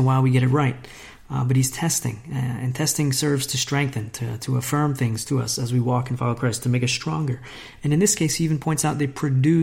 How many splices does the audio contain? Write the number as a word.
zero